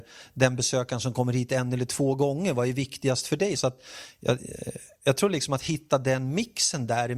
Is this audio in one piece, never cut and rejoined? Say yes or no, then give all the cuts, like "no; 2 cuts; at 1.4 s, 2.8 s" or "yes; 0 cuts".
no; 1 cut; at 3.6 s